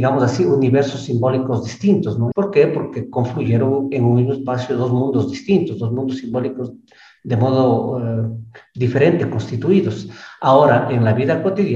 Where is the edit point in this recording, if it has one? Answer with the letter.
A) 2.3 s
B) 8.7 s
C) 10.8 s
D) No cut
A